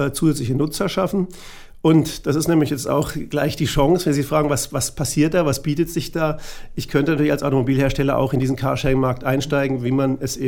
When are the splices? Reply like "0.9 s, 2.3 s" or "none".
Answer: none